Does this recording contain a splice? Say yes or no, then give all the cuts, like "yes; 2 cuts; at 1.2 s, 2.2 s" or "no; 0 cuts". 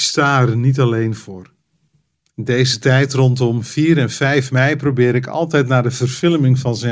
yes; 1 cut; at 2.2 s